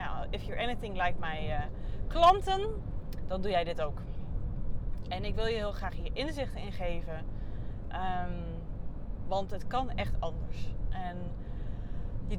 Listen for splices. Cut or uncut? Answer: uncut